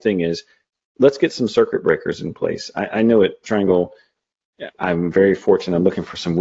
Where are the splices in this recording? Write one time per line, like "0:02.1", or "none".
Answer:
0:04.7